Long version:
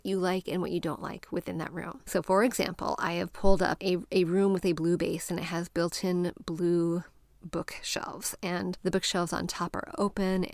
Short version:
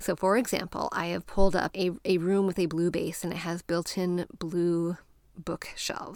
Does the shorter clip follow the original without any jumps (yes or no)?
yes